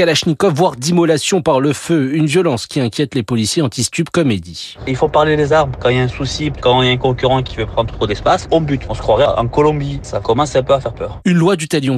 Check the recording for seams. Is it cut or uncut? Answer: cut